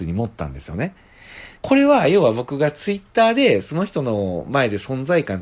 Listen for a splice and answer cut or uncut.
cut